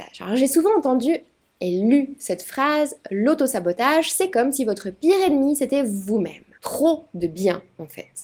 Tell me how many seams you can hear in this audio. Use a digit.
1